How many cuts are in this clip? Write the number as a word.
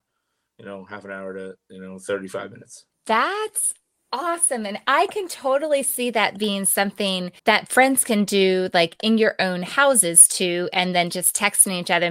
two